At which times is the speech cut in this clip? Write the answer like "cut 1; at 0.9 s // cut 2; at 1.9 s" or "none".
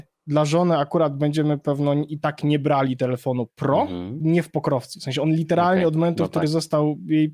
cut 1; at 4.2 s